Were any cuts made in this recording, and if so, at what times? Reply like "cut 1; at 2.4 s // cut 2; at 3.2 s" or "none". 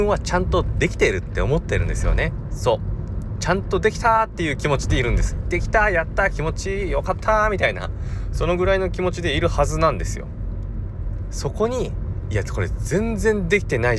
none